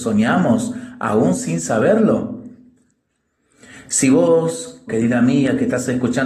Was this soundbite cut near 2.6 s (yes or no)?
no